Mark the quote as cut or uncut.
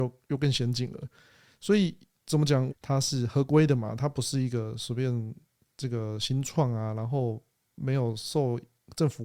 cut